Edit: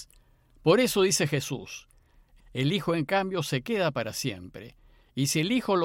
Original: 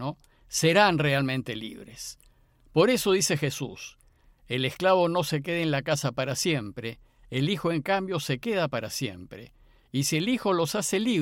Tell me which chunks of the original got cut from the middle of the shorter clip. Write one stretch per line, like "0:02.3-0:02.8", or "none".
0:04.5-0:07.1